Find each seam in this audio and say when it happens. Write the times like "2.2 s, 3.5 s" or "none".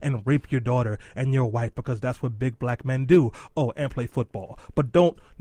none